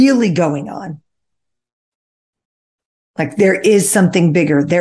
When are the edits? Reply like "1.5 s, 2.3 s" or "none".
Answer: none